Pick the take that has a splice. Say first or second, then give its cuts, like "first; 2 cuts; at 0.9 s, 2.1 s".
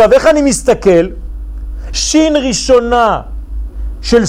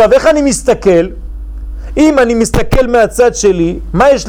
first; 1 cut; at 1.9 s